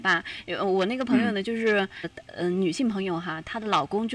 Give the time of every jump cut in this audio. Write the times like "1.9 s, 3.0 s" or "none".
2.0 s